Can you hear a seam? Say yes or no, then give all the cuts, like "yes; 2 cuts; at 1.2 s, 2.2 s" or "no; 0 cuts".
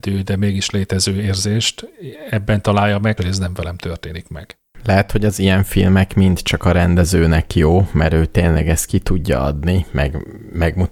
yes; 1 cut; at 3.2 s